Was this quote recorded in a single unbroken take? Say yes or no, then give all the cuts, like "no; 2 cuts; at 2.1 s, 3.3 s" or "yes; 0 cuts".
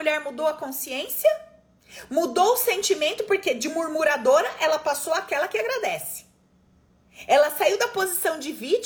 yes; 0 cuts